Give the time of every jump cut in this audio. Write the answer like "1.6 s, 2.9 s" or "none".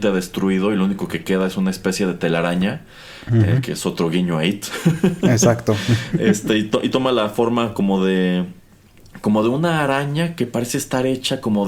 none